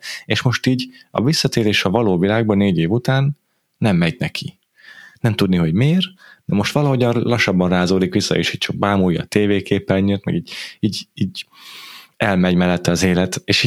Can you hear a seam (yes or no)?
no